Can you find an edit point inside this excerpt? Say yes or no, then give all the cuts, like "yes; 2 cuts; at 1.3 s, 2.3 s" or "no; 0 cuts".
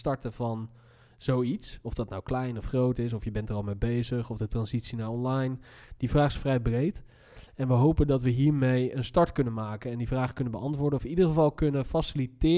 no; 0 cuts